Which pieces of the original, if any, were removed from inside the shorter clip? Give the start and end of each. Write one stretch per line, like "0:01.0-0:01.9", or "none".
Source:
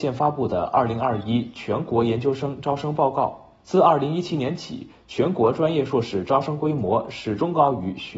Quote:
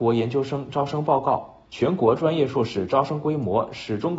0:03.6-0:05.0